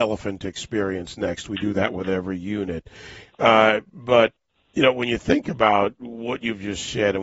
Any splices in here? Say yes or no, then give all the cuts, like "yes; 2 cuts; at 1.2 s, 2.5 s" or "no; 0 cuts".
no; 0 cuts